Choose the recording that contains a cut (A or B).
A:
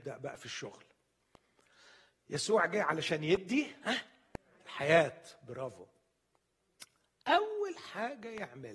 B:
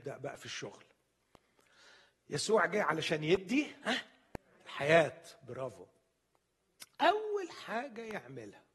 B